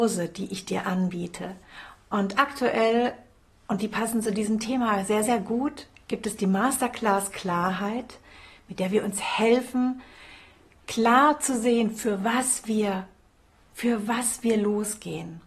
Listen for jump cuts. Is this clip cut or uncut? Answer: uncut